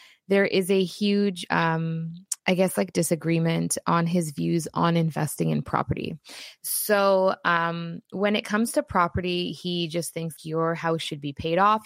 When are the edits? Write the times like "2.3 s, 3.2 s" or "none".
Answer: 2.4 s, 10.4 s

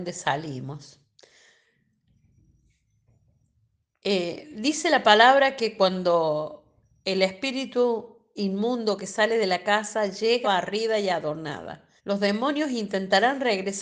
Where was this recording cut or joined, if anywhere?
10.4 s, 12.0 s

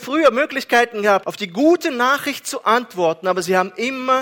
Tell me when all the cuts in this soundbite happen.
1.2 s

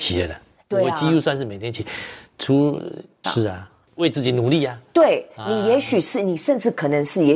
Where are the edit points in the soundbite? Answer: 3.2 s

